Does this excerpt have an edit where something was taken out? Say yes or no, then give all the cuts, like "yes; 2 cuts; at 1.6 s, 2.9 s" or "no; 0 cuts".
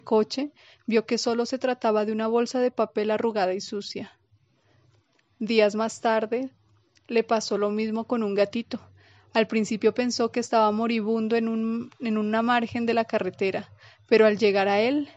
no; 0 cuts